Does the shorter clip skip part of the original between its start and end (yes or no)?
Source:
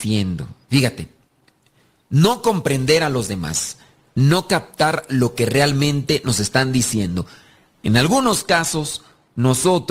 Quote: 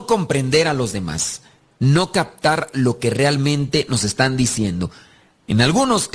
no